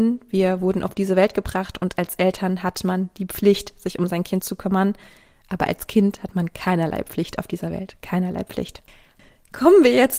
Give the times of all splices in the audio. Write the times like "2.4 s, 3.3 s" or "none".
none